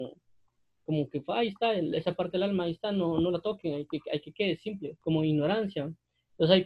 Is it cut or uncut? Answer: cut